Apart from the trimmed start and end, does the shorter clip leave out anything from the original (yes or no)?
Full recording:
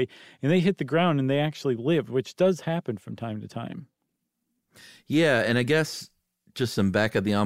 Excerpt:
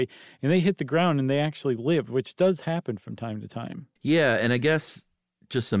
yes